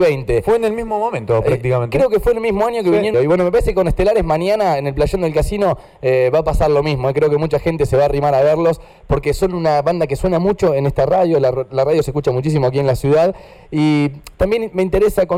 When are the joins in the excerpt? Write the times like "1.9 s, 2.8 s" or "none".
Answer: 3.1 s